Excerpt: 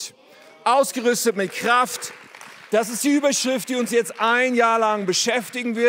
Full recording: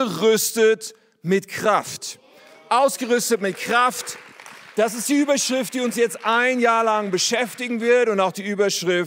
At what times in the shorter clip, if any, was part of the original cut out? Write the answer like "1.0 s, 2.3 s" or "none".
none